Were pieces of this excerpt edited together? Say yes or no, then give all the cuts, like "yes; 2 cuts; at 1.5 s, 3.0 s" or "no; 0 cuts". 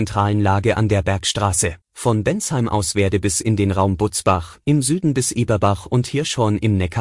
yes; 1 cut; at 1.8 s